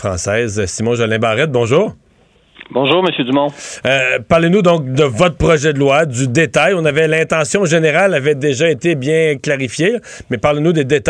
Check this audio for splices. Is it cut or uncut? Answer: uncut